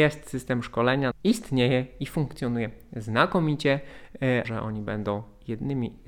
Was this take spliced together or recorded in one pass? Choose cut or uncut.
cut